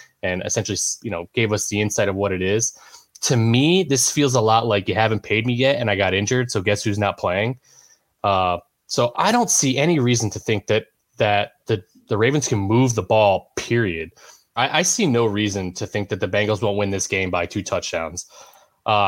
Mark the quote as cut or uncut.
cut